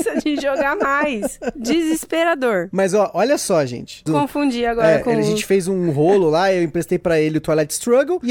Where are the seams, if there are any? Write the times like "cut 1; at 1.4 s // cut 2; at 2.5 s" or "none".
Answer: cut 1; at 4.1 s